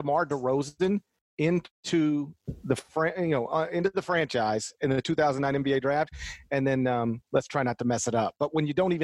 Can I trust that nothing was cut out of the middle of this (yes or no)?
yes